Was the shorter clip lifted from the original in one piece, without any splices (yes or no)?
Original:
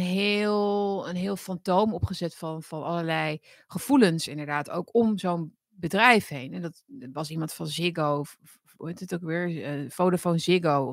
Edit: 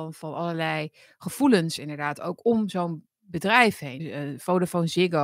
no